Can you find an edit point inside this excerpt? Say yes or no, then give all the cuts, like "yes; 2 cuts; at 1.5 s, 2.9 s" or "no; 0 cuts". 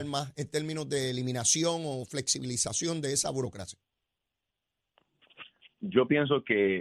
no; 0 cuts